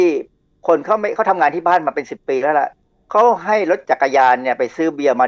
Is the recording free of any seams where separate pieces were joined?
yes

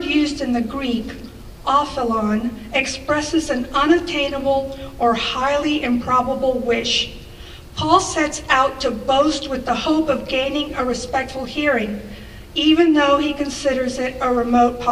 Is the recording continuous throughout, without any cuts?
yes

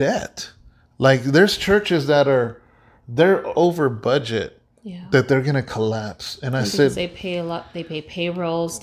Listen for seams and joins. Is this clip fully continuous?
no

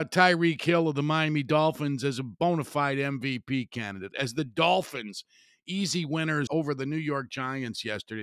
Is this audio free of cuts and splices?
no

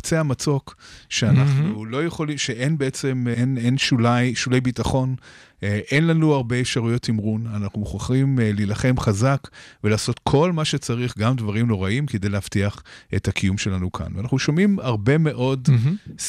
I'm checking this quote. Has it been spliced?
yes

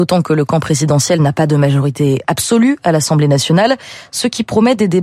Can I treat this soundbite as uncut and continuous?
yes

